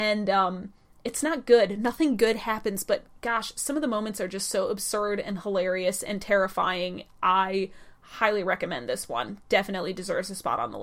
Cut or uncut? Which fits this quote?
uncut